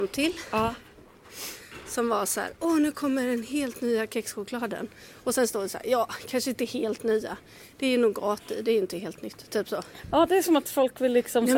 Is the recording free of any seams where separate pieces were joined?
yes; 0 cuts

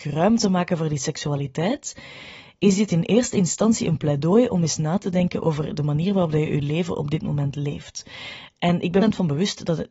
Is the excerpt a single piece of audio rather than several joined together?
no; 1 cut; at 9.0 s

